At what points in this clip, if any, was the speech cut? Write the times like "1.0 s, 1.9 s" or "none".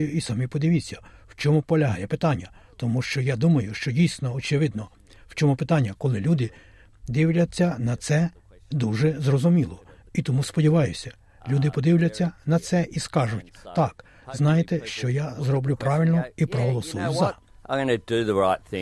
none